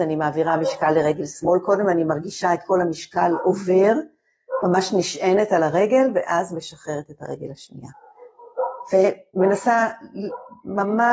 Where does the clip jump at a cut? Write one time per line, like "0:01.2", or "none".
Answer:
none